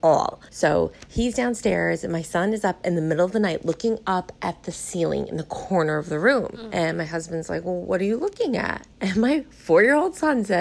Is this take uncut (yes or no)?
yes